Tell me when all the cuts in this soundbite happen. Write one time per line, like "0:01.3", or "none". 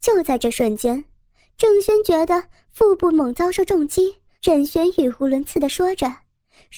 0:04.4